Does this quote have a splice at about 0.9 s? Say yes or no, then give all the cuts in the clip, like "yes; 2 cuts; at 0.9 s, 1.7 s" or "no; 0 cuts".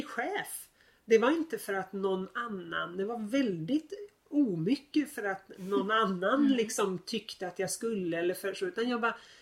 no; 0 cuts